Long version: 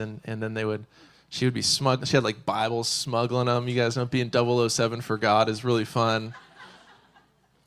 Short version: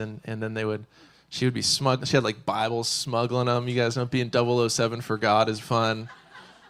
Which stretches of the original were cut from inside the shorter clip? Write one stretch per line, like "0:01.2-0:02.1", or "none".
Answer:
0:05.6-0:05.9